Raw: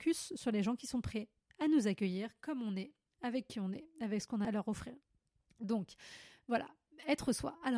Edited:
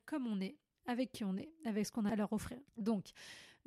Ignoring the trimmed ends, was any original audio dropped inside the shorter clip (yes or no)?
yes